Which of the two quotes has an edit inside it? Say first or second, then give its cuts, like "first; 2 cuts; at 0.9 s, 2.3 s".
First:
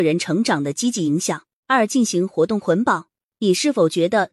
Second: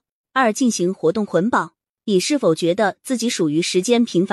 first; 1 cut; at 1.6 s